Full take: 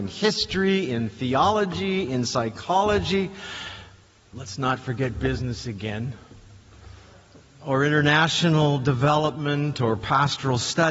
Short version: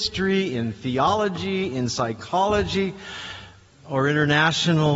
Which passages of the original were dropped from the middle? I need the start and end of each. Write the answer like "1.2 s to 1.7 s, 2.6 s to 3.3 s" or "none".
4.1 s to 7.5 s